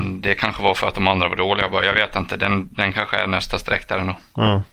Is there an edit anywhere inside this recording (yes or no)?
no